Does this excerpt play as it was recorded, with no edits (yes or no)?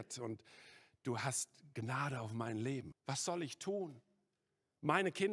no